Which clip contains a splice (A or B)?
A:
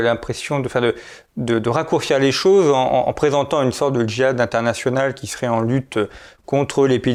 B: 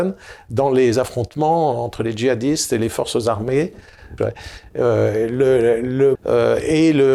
B